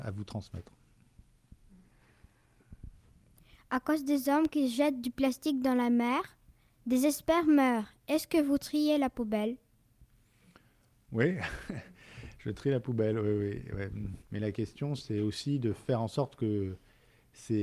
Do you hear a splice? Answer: yes; 1 cut; at 14.2 s

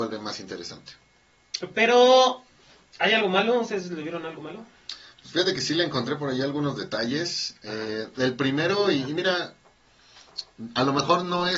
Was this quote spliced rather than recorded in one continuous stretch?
no; 0 cuts

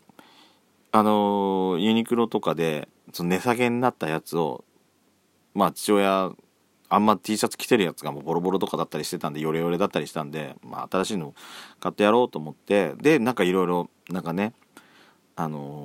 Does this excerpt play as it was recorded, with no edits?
yes; 0 cuts

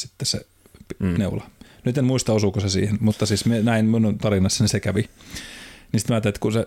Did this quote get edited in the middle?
no; 0 cuts

